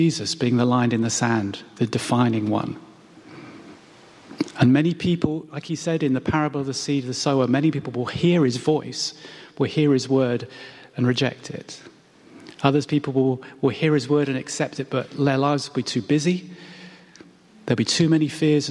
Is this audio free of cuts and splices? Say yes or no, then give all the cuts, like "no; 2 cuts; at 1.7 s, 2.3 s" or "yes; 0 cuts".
yes; 0 cuts